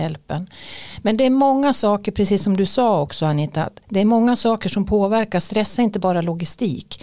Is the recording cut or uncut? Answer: uncut